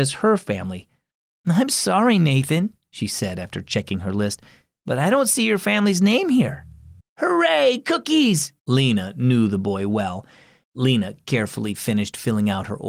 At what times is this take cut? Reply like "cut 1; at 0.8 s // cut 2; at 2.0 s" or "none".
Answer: cut 1; at 7.0 s // cut 2; at 8.6 s // cut 3; at 10.6 s

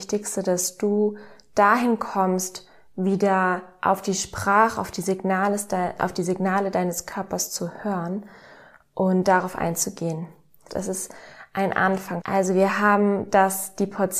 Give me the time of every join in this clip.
cut 1; at 10.7 s // cut 2; at 12.2 s

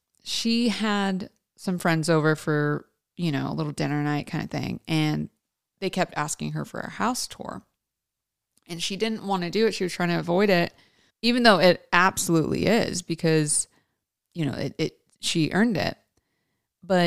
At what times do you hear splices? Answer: cut 1; at 11.1 s

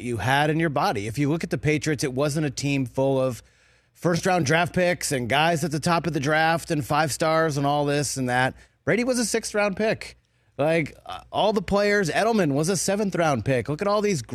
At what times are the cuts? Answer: none

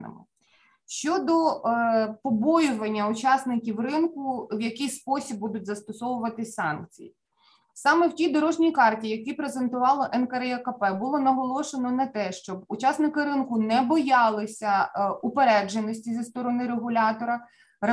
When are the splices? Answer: none

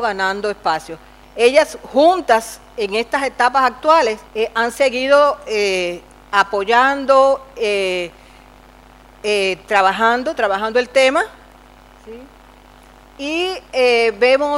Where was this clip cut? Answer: cut 1; at 1.2 s // cut 2; at 4.3 s

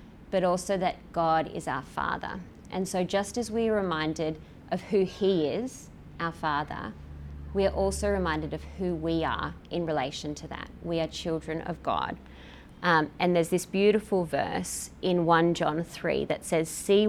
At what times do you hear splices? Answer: none

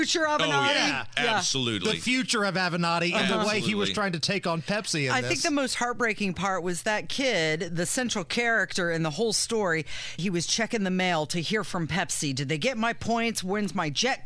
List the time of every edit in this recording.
cut 1; at 7.7 s // cut 2; at 10.2 s

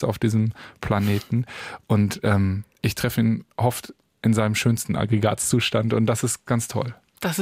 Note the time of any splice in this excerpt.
cut 1; at 2.7 s // cut 2; at 6.5 s

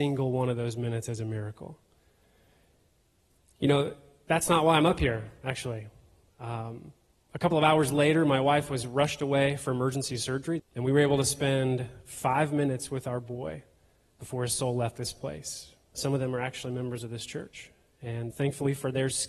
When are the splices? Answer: cut 1; at 10.6 s // cut 2; at 15.9 s // cut 3; at 18.3 s

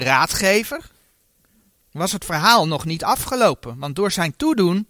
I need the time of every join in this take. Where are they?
none

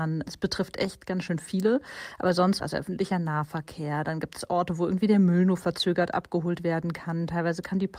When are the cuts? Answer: none

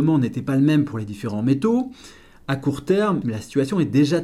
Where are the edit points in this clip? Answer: cut 1; at 3.2 s

